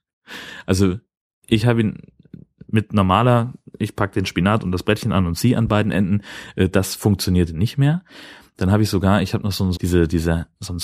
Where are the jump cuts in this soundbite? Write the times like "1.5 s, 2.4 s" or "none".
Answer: 8.5 s, 9.8 s